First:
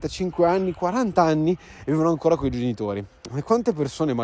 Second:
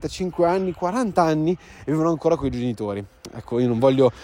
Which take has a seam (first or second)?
first